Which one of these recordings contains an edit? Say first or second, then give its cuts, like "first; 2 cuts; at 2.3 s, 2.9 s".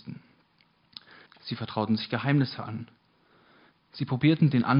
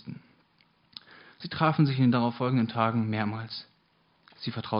first; 1 cut; at 1.3 s